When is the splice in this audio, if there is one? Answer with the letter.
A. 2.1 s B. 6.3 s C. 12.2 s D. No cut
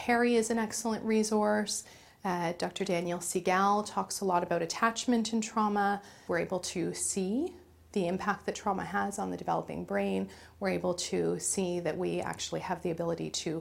B